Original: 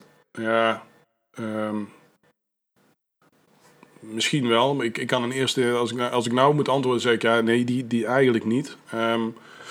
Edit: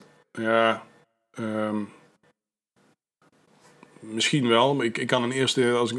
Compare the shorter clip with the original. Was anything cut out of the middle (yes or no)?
no